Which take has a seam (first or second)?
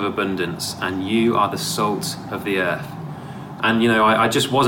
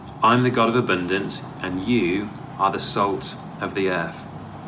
first